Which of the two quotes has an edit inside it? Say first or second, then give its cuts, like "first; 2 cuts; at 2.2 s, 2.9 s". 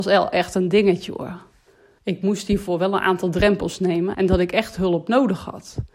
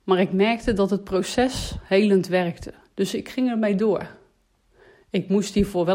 first; 2 cuts; at 2.0 s, 4.1 s